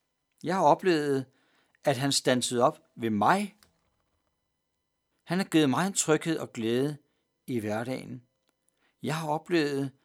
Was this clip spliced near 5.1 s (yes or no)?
yes